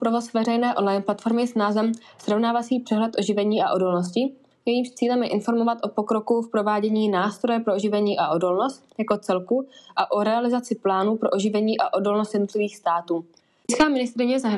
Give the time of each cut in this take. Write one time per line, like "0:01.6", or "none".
0:13.6